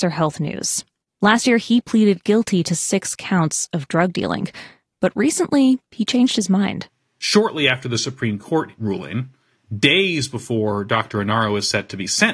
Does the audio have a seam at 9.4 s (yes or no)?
no